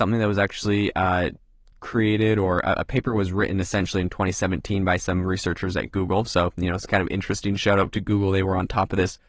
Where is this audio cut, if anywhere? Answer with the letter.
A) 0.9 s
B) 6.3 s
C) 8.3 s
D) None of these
D